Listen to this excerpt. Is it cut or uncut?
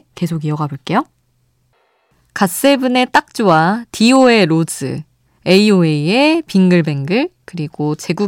uncut